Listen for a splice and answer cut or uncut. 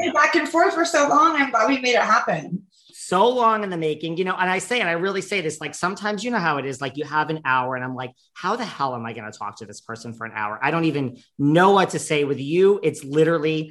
uncut